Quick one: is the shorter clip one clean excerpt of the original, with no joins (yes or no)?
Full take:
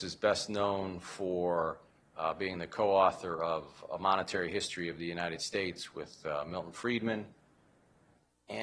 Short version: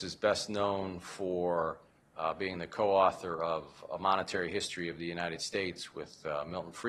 yes